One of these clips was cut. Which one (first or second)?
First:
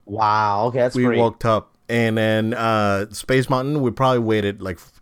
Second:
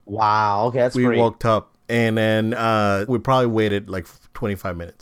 second